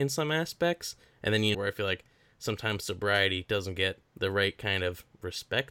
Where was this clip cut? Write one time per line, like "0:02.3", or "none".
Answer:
0:01.5
0:04.1